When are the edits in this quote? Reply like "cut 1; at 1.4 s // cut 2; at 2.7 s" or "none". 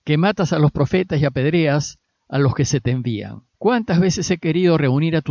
cut 1; at 3.5 s